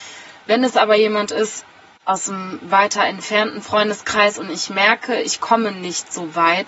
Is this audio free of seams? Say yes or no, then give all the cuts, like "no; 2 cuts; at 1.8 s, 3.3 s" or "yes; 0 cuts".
yes; 0 cuts